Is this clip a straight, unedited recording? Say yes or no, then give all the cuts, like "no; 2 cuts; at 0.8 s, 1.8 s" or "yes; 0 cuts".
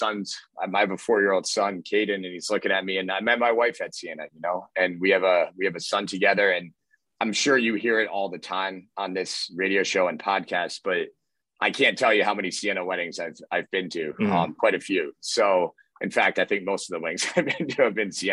yes; 0 cuts